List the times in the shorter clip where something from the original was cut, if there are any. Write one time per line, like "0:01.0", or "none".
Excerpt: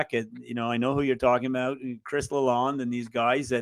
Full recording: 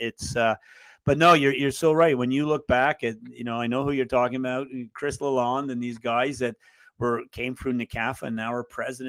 none